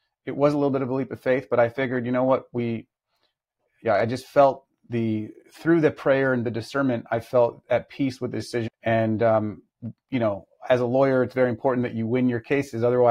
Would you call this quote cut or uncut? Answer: cut